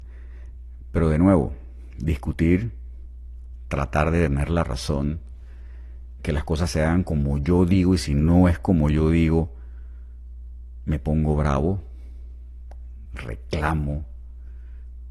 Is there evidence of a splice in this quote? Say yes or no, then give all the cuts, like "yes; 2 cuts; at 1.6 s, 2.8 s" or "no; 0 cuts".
yes; 2 cuts; at 6.2 s, 13.0 s